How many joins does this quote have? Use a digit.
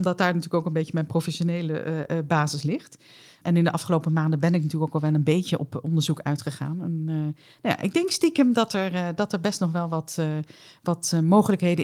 0